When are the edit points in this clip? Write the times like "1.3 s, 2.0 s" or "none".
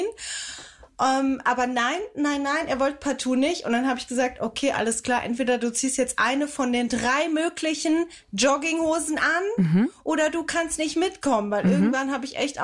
none